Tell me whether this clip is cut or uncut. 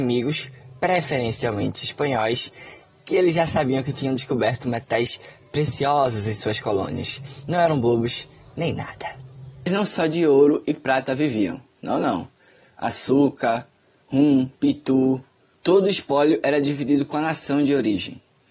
cut